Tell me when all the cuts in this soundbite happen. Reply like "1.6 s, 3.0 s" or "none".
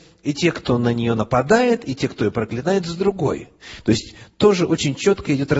none